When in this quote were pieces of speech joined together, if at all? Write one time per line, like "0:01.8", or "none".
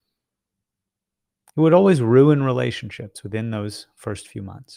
none